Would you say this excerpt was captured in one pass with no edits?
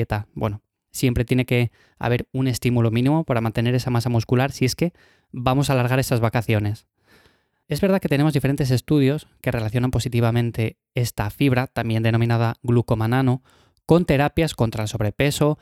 no; 1 cut; at 7.5 s

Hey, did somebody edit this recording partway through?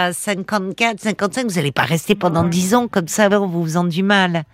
yes; 1 cut; at 3.3 s

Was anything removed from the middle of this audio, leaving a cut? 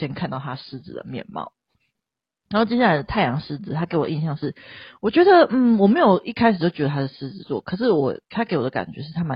no; 0 cuts

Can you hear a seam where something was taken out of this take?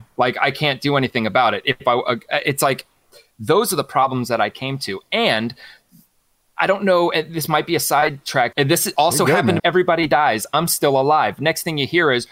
yes; 2 cuts; at 8.5 s, 9.6 s

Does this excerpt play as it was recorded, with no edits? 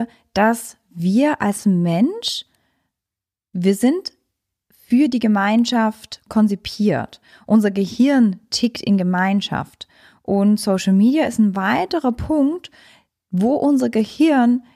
yes; 0 cuts

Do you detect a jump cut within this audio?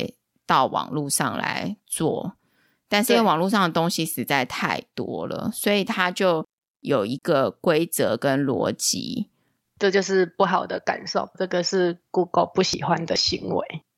yes; 2 cuts; at 9.6 s, 11.3 s

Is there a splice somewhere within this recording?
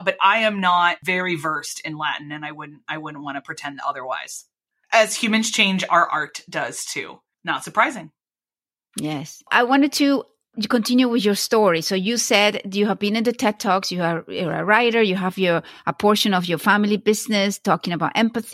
no; 0 cuts

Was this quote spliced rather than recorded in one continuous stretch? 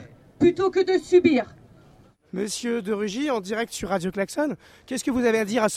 no; 0 cuts

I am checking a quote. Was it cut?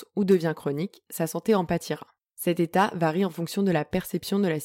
yes; 1 cut; at 2.2 s

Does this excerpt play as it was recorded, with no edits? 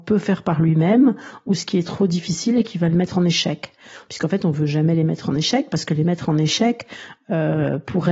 yes; 0 cuts

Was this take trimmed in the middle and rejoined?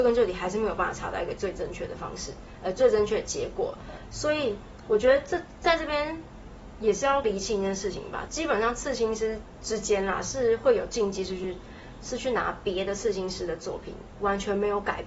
no; 0 cuts

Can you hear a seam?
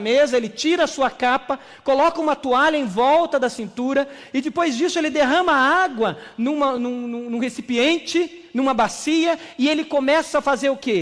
no; 0 cuts

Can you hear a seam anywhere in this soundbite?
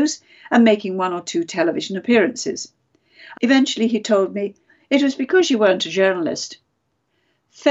yes; 2 cuts; at 3.3 s, 4.7 s

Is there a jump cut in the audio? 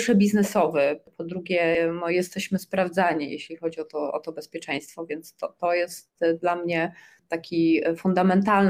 no; 0 cuts

